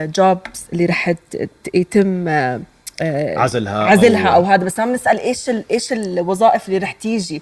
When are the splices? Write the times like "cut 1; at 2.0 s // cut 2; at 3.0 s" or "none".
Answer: none